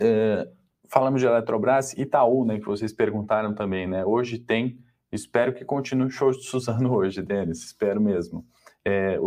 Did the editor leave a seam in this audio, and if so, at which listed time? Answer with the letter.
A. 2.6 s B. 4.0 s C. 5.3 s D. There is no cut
D